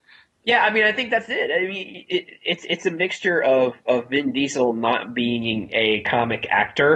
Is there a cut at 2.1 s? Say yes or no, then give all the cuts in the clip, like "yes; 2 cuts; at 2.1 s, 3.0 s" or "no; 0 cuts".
no; 0 cuts